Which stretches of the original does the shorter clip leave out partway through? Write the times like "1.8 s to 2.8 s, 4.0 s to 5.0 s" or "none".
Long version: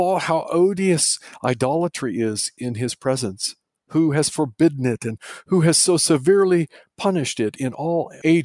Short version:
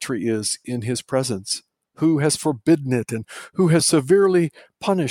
5.7 s to 6.0 s